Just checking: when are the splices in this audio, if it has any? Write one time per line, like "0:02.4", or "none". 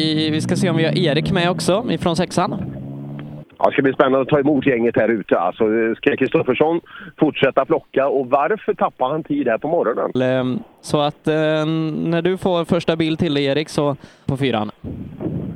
0:03.4
0:10.2
0:14.3